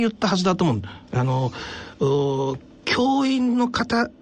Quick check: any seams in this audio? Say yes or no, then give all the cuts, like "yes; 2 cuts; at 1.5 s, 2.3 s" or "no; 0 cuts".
yes; 1 cut; at 1.1 s